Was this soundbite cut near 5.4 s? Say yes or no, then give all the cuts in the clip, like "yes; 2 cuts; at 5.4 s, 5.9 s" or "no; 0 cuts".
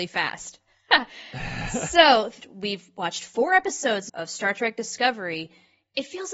no; 2 cuts; at 2.4 s, 4.1 s